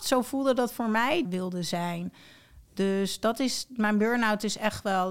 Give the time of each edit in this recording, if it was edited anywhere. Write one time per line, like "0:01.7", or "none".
0:01.2